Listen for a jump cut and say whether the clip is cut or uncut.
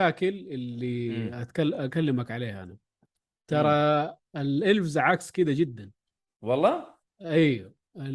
uncut